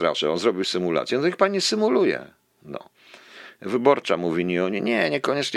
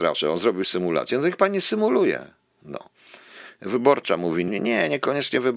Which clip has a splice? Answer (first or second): second